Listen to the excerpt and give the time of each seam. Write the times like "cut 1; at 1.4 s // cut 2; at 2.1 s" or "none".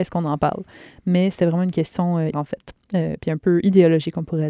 cut 1; at 2.3 s